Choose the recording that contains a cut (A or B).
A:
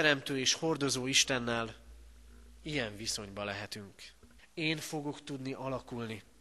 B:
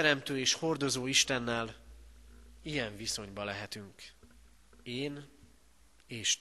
A